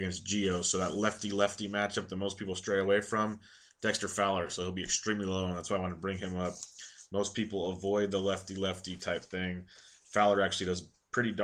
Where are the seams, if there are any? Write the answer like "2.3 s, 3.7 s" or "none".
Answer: none